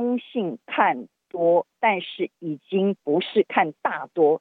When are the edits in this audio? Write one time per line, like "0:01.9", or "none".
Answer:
none